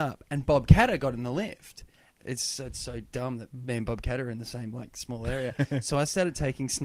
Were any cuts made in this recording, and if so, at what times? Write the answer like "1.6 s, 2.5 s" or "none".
2.2 s